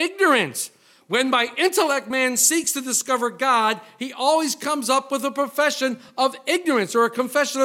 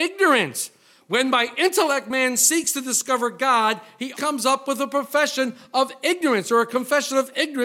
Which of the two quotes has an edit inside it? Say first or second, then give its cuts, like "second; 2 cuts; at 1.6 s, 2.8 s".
second; 1 cut; at 4.1 s